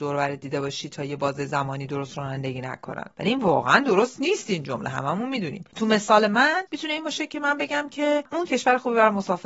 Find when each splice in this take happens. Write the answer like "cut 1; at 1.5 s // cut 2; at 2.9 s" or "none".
cut 1; at 8.5 s